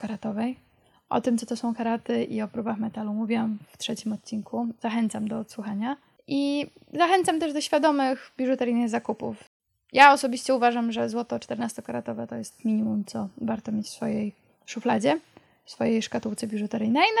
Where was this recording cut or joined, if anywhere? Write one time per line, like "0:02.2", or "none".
none

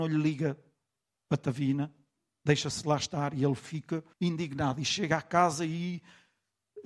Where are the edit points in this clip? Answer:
0:04.1

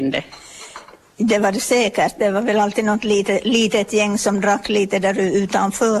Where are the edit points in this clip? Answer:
none

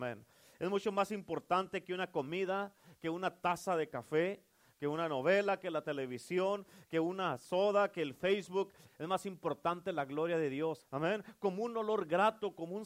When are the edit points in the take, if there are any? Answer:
0:05.6
0:08.9
0:10.8

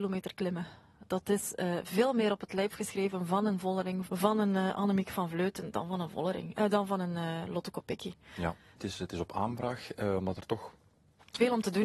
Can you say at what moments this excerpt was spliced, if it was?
0:04.0
0:08.8

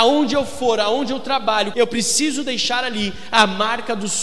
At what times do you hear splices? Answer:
0:01.7

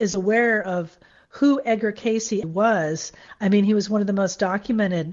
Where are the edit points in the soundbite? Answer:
0:02.4

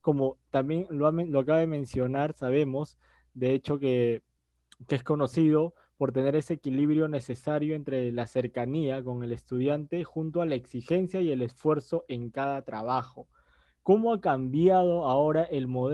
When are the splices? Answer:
none

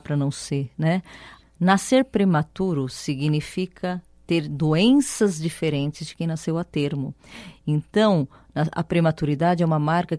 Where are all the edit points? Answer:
0:01.4

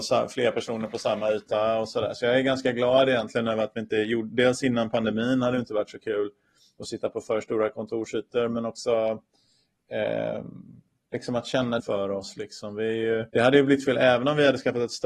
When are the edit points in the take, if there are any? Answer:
0:11.8
0:13.3

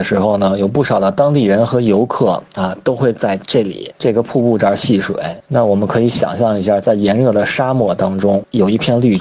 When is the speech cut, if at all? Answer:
0:03.4

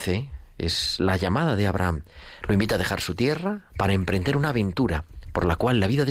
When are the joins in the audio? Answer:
0:02.4
0:03.7

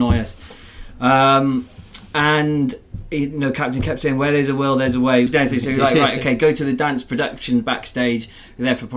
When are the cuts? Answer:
0:05.3

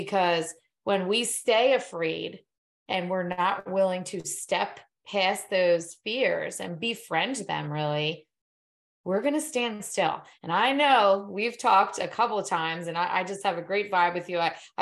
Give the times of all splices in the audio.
none

